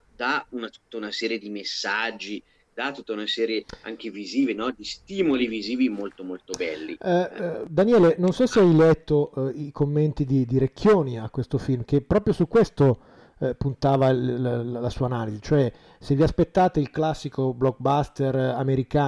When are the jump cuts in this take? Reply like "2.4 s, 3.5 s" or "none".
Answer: none